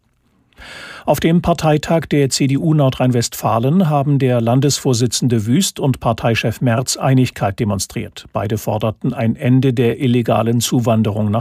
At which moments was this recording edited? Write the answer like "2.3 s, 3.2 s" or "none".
none